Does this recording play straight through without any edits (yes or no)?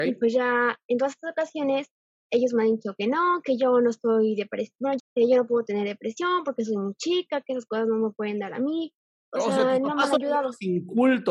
no